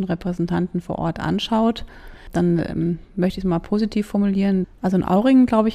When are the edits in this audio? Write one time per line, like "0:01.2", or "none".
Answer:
0:04.6